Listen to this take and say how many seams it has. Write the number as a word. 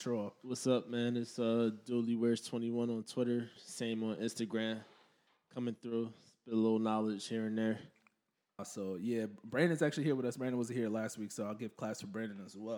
two